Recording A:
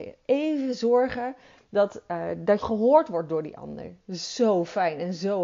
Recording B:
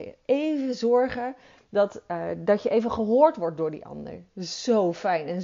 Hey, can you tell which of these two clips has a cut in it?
A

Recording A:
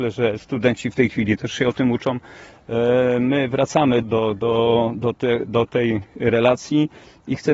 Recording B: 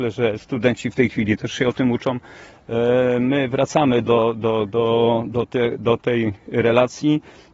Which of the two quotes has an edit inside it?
A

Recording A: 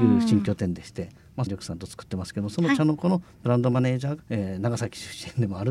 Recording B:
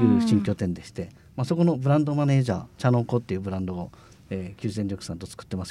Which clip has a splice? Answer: A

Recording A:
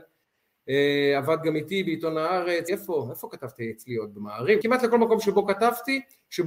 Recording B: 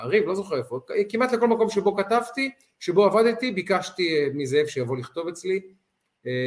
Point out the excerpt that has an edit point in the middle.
A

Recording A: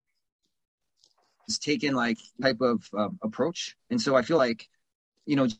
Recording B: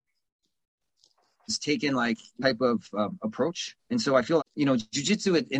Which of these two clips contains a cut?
B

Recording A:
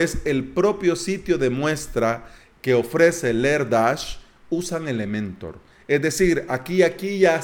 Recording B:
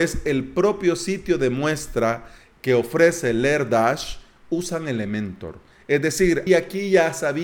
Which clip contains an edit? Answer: B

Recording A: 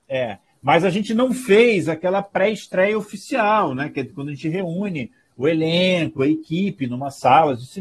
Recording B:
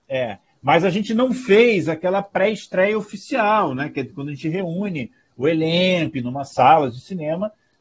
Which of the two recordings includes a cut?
B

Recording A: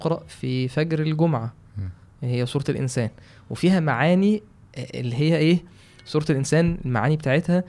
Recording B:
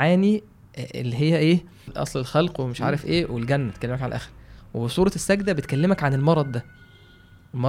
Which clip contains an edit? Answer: B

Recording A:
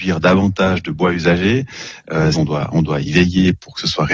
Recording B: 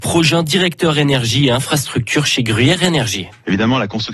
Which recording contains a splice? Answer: A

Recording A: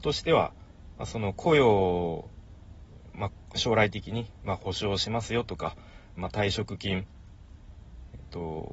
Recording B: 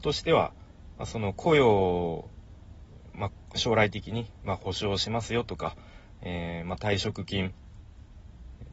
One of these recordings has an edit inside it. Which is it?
A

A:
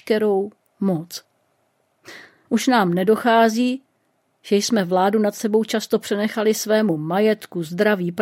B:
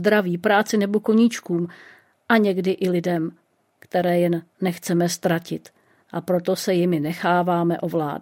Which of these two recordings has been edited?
A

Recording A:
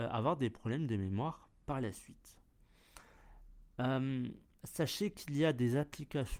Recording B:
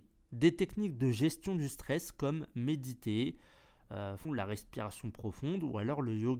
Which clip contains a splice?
B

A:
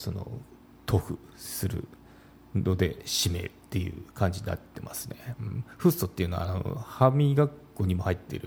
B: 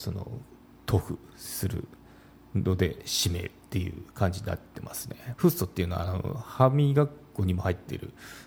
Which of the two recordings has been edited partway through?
B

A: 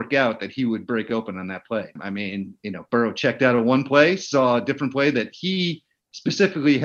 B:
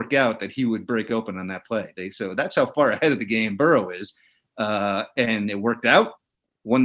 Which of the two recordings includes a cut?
A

